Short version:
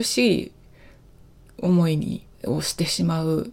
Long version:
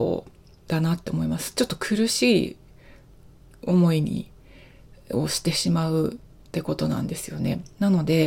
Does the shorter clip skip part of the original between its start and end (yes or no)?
yes